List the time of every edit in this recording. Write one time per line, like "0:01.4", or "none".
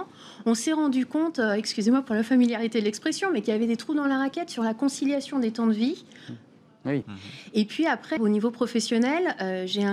0:07.0
0:08.2